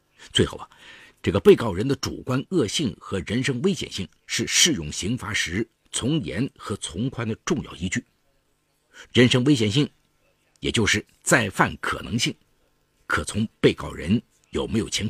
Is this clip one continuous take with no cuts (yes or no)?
no